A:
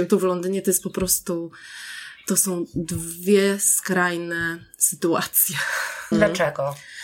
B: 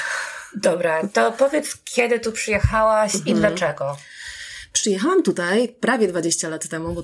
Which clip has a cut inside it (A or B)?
A